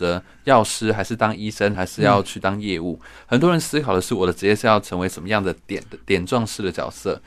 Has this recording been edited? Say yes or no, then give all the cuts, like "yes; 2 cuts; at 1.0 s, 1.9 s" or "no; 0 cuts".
yes; 1 cut; at 1.7 s